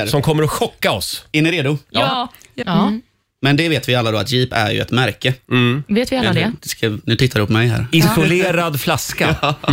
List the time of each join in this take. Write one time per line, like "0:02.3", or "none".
0:02.6
0:06.6

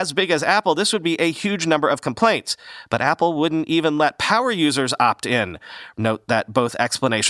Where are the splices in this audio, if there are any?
0:05.9

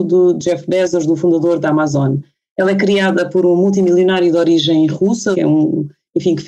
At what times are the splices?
0:02.5
0:05.3

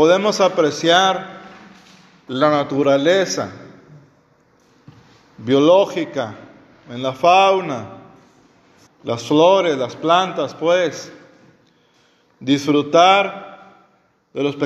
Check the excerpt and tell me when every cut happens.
0:08.9

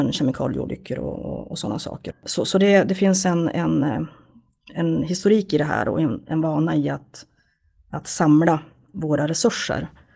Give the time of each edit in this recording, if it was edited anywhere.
0:02.1

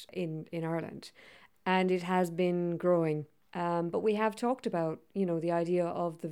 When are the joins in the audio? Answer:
0:03.4

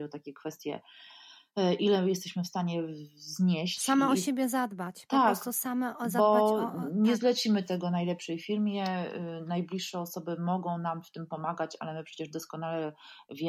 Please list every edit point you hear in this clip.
none

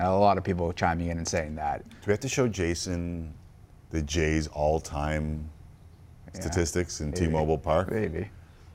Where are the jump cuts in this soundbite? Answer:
0:01.8

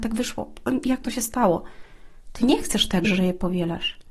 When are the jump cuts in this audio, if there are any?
0:03.0

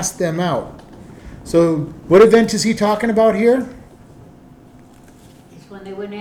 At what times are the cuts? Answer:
none

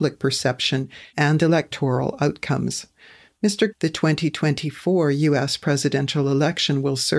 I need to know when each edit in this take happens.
0:03.7

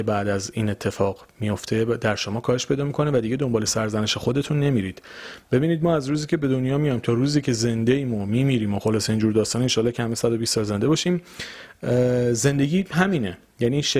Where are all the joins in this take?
none

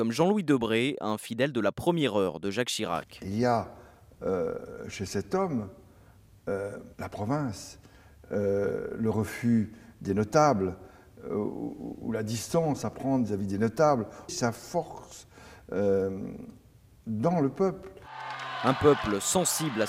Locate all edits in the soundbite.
0:06.9
0:14.3

